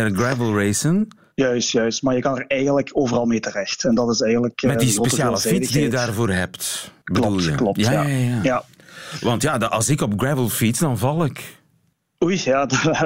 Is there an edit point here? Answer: no; 0 cuts

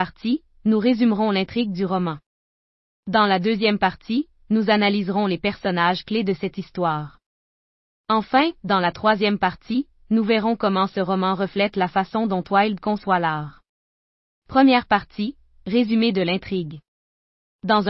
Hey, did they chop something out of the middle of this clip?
no; 0 cuts

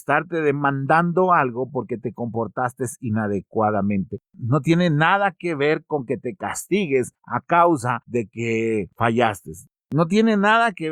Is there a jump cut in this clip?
no; 0 cuts

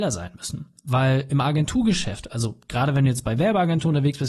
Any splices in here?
no; 0 cuts

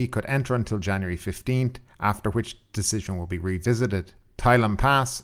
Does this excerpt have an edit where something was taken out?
yes; 1 cut; at 4.3 s

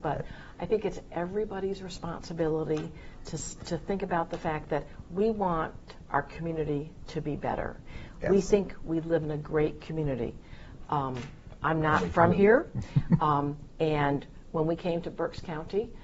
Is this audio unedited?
yes; 0 cuts

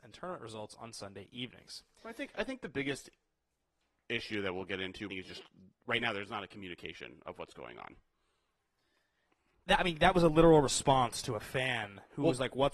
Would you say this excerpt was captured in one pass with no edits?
no; 1 cut; at 5.1 s

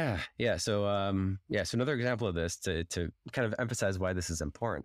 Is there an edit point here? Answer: no; 0 cuts

